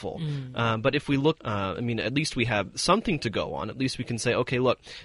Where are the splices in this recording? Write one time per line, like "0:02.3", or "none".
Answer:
0:01.4